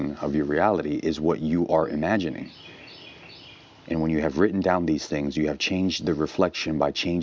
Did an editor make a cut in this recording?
no; 0 cuts

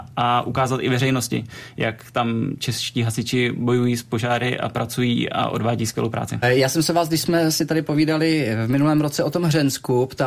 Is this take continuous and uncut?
no; 1 cut; at 6.4 s

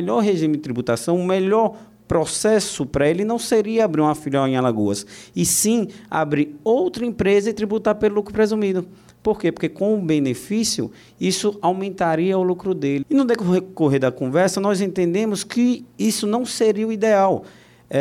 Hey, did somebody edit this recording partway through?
yes; 1 cut; at 13.0 s

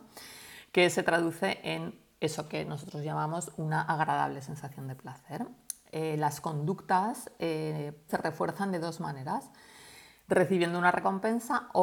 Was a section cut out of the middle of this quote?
yes; 1 cut; at 8.1 s

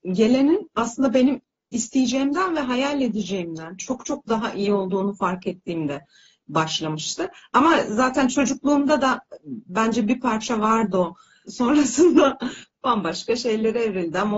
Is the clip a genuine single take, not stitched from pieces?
no; 1 cut; at 11.5 s

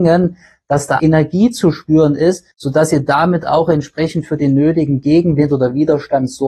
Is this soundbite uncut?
no; 2 cuts; at 1.0 s, 2.5 s

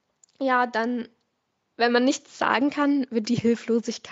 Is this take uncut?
yes; 0 cuts

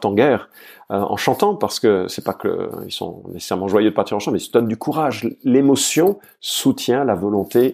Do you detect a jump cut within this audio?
no; 0 cuts

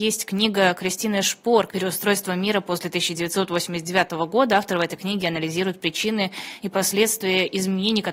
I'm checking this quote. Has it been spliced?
yes; 1 cut; at 1.7 s

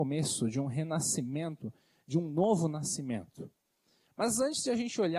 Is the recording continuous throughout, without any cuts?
no; 1 cut; at 4.1 s

